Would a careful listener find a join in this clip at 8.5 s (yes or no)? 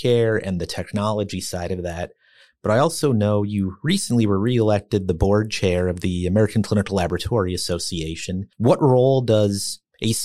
yes